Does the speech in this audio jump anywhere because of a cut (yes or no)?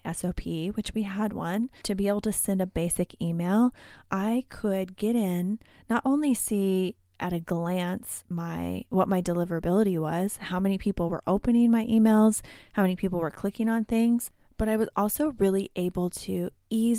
yes